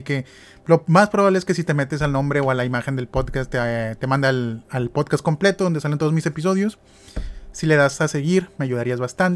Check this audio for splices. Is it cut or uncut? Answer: cut